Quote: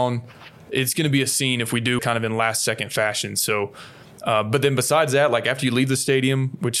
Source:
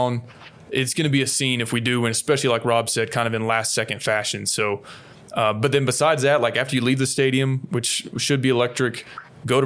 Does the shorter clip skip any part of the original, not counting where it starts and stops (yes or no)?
yes